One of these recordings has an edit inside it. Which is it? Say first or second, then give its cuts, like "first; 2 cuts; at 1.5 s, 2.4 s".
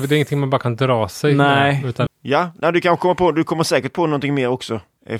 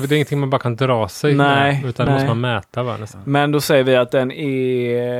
first; 1 cut; at 2.1 s